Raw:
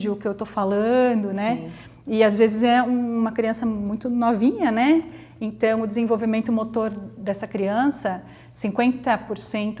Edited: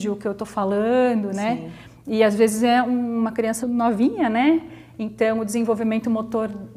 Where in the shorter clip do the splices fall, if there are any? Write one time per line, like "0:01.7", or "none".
0:03.6